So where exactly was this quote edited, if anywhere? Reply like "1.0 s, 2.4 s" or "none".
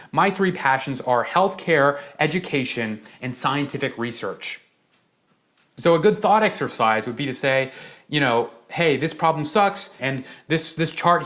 10.0 s